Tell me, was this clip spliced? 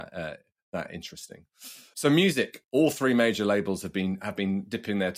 no; 0 cuts

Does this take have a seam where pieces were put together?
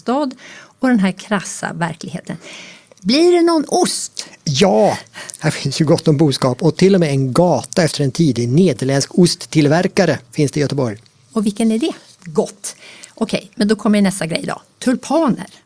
yes; 1 cut; at 12.2 s

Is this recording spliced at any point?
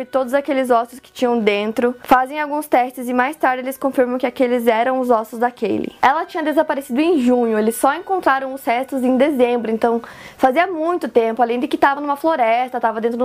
no; 0 cuts

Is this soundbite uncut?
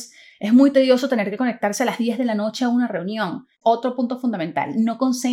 no; 1 cut; at 3.5 s

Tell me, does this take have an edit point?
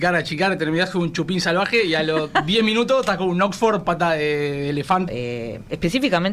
yes; 1 cut; at 5.1 s

